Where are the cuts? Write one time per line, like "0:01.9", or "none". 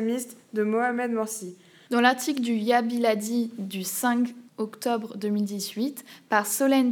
0:01.9
0:04.5